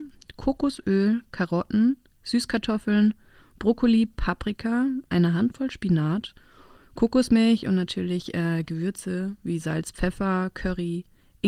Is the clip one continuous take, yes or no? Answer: yes